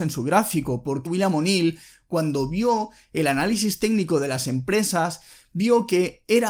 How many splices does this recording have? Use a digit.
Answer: 1